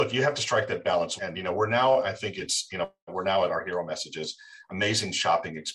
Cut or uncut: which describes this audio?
cut